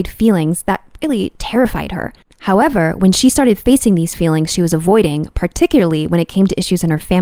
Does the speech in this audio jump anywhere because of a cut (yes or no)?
no